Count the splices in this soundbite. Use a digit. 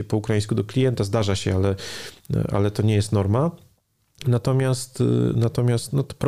0